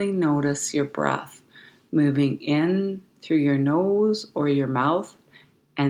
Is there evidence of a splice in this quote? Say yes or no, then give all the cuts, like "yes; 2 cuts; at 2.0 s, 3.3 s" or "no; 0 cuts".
no; 0 cuts